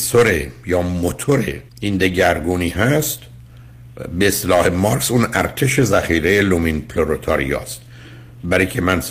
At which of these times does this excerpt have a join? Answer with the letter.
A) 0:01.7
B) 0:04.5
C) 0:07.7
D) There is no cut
A